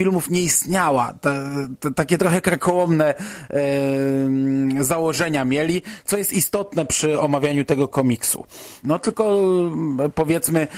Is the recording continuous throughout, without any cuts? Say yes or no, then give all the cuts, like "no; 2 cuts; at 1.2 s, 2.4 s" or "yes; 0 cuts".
no; 1 cut; at 8.8 s